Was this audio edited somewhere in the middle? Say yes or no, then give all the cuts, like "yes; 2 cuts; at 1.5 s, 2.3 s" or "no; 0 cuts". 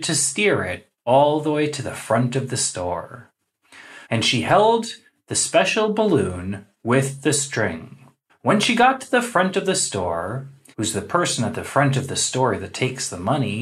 yes; 3 cuts; at 4.0 s, 8.3 s, 10.7 s